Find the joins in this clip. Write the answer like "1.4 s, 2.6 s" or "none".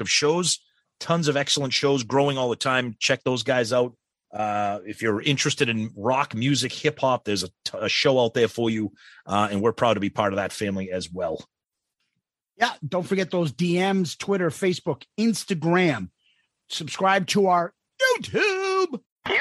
none